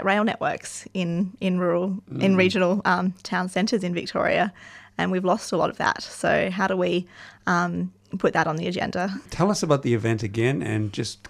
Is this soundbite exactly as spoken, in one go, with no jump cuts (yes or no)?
no